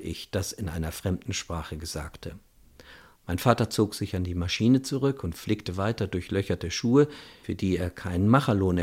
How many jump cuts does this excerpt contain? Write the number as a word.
one